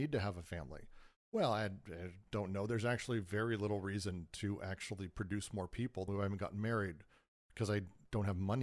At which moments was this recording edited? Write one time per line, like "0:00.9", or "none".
0:06.1